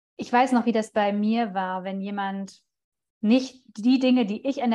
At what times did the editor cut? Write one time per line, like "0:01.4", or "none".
none